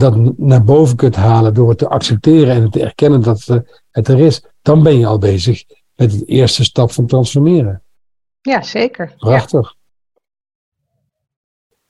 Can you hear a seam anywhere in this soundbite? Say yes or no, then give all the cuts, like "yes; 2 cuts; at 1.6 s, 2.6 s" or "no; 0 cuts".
no; 0 cuts